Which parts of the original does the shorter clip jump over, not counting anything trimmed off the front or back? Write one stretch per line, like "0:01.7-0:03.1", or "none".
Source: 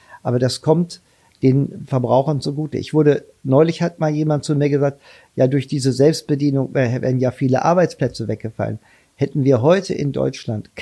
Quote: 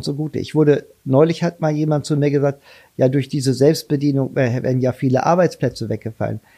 none